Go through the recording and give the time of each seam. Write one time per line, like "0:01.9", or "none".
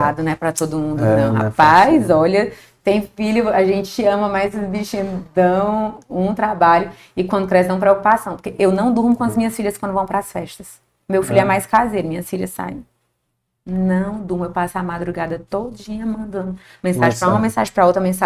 none